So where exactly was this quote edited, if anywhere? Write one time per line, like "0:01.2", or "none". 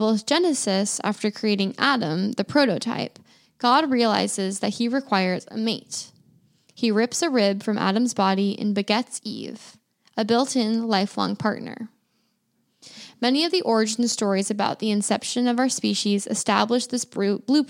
none